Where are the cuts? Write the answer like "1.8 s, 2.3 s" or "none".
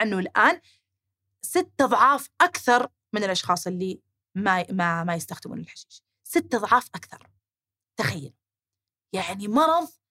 none